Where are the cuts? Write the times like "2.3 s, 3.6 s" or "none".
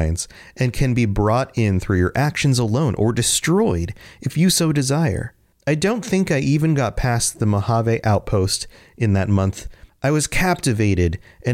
5.5 s, 9.9 s